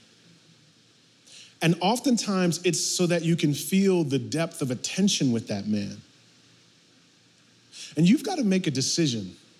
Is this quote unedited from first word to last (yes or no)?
yes